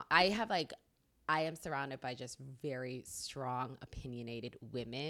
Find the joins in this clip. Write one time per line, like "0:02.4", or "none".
none